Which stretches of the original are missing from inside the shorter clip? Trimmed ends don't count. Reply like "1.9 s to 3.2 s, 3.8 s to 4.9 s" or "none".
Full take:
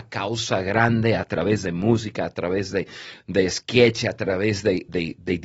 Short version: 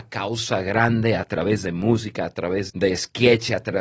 2.7 s to 3.2 s